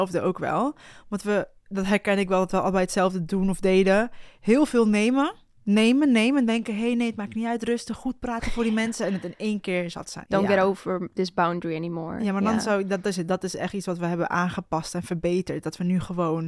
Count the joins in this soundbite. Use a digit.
2